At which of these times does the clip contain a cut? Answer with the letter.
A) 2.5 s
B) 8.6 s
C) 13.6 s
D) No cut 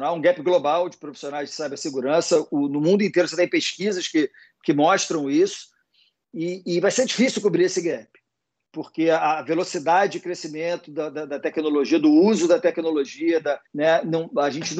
C